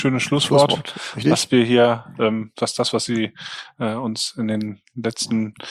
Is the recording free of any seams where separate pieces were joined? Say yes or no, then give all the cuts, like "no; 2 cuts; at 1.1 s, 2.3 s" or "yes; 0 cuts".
yes; 0 cuts